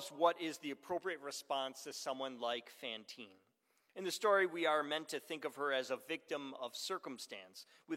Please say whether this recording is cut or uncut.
uncut